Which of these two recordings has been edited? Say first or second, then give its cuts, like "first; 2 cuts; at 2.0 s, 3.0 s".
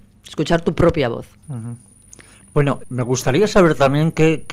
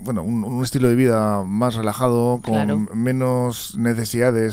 first; 2 cuts; at 1.4 s, 2.8 s